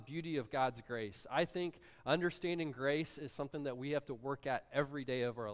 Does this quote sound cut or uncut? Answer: uncut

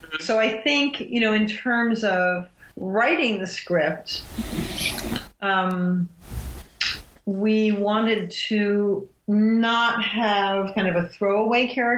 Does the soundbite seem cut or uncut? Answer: uncut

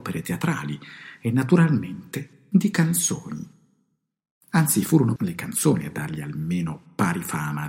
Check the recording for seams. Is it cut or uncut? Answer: cut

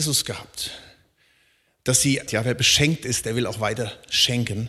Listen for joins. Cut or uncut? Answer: cut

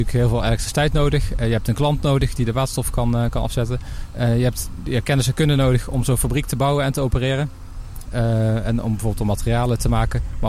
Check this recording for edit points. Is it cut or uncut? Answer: cut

